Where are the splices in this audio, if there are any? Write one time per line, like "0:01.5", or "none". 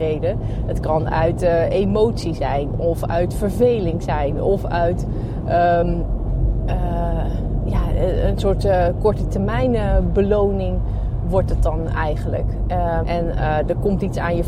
0:05.8
0:13.0

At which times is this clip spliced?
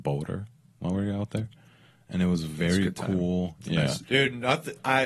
0:04.0

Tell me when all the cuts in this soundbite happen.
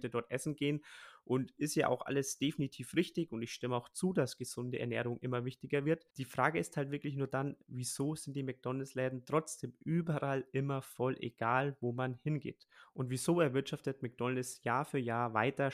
0:06.1

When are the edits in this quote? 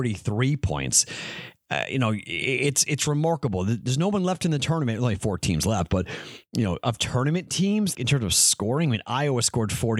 0:07.9

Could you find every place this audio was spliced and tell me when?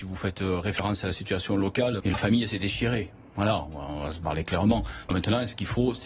0:02.0

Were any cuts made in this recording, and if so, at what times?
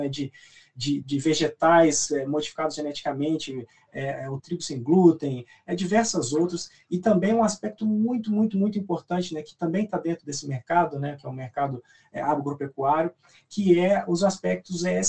0:01.0
0:04.4

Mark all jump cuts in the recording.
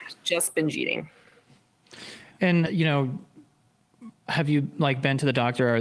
0:02.7
0:04.1

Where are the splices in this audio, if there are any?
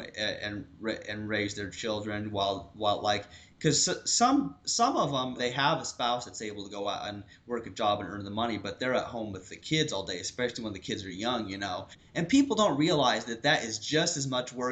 0:05.4

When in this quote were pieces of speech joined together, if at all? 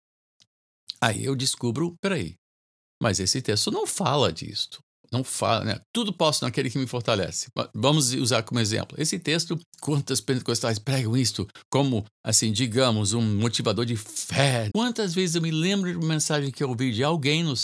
0:12.1
0:14.7

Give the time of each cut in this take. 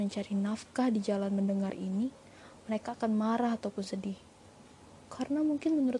none

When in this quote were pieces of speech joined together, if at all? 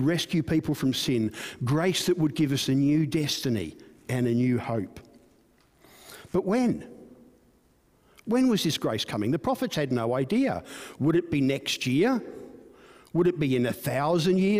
none

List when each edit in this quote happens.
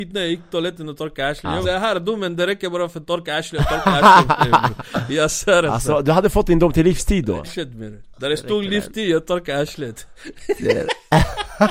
0:01.6
0:07.4

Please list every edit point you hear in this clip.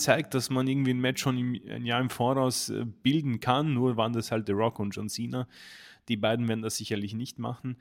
none

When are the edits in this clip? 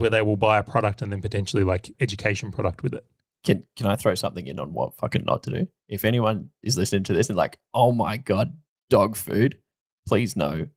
0:01.9

